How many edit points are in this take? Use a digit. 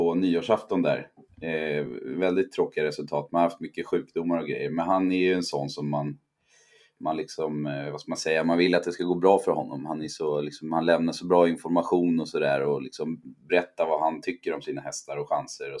0